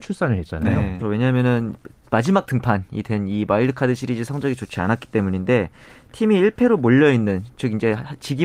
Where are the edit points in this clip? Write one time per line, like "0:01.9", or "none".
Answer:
0:01.0

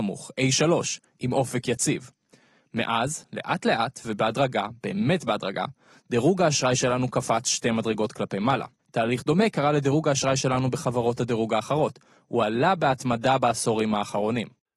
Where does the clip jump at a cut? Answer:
none

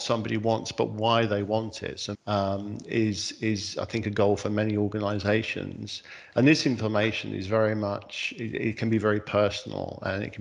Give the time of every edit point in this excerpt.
0:02.1
0:06.3

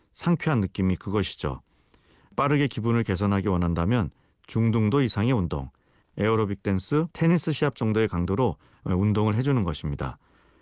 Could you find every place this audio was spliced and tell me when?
0:06.0
0:07.1

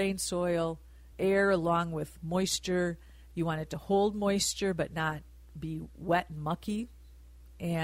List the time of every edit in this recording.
0:01.1

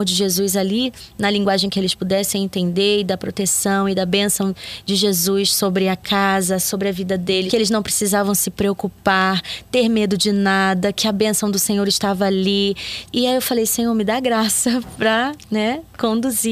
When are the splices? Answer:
0:07.5
0:13.1

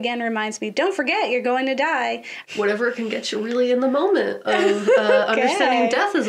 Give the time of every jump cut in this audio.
0:02.4

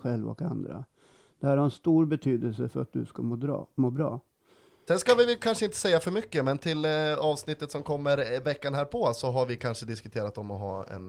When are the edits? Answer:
0:04.9

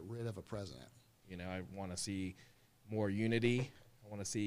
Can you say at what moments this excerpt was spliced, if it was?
0:01.2

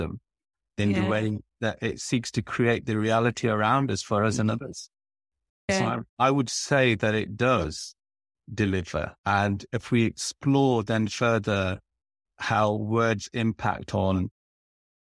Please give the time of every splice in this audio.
0:09.2

